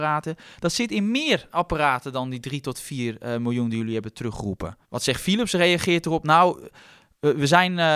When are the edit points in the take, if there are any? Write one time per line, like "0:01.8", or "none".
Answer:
0:04.8